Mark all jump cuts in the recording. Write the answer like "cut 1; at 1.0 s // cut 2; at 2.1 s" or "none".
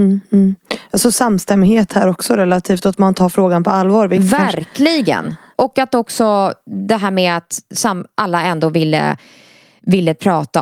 none